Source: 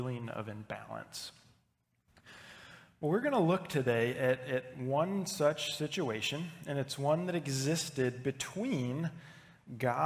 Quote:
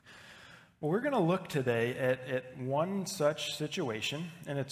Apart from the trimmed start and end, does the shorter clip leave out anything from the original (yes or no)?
no